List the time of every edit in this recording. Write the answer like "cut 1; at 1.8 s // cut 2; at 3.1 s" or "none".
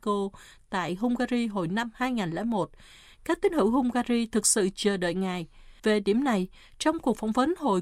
cut 1; at 5.8 s